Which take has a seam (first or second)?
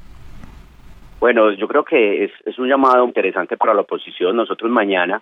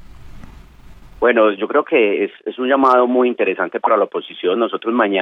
first